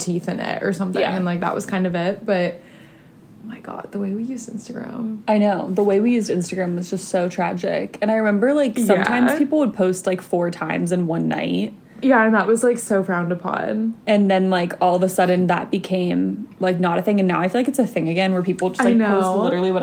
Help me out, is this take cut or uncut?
uncut